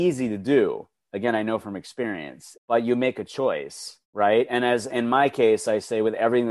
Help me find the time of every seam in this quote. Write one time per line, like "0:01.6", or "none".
0:02.5
0:04.0